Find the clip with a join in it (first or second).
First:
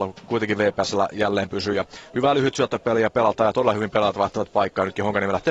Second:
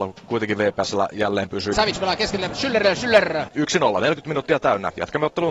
second